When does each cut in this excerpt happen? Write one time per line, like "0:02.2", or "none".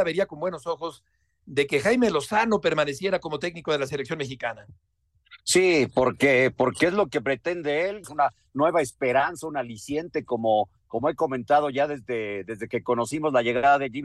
0:08.0